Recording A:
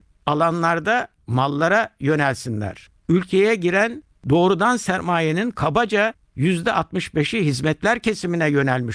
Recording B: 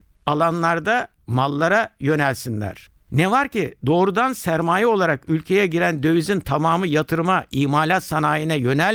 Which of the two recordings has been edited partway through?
A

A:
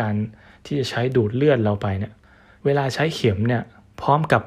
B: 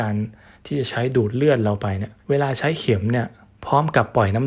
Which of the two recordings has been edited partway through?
B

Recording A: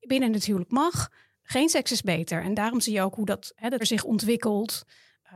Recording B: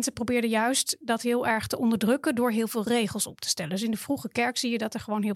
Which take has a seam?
A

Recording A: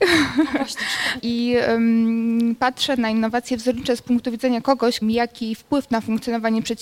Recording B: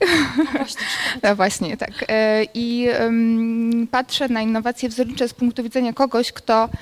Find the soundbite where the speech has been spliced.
A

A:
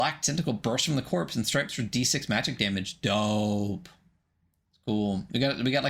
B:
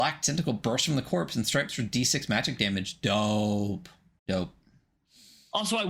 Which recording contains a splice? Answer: B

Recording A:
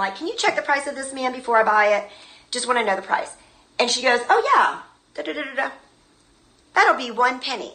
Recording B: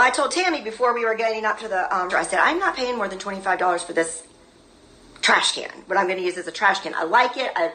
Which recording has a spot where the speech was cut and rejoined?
B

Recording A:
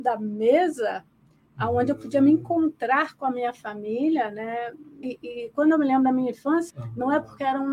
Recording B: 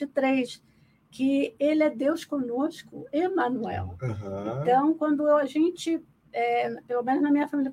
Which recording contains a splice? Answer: A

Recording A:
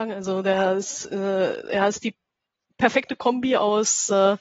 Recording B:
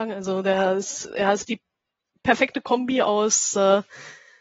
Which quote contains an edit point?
B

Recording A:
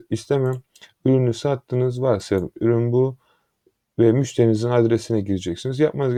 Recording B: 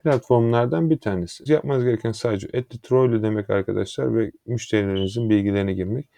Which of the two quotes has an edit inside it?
B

